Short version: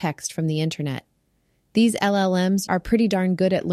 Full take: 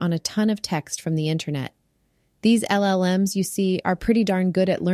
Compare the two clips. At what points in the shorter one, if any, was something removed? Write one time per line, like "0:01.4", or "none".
0:02.7